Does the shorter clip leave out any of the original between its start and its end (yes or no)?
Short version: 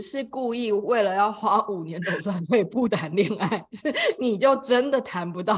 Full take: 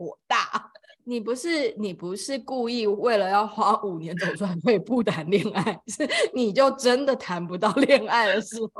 no